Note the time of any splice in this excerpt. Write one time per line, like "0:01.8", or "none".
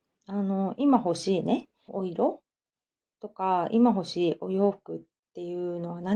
0:01.9